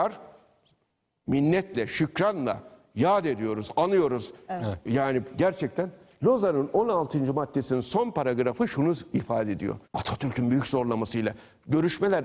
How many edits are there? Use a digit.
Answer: 1